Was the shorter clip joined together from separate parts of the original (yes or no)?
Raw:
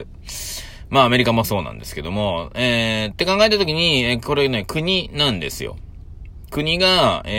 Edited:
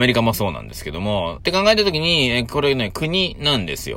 yes